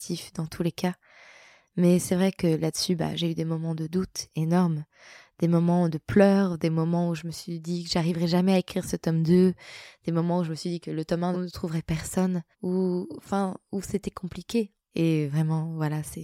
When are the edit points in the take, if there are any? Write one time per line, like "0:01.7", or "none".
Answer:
0:11.3
0:12.5
0:14.9